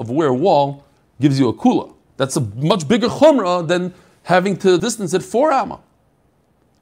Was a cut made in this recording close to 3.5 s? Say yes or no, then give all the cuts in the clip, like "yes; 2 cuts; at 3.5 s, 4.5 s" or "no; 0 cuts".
no; 2 cuts; at 2.1 s, 4.8 s